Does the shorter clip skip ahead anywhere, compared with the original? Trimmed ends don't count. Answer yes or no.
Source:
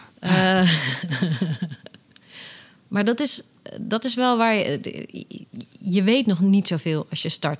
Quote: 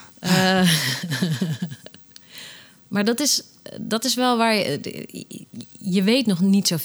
no